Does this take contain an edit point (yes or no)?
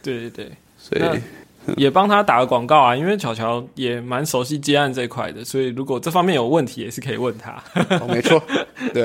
no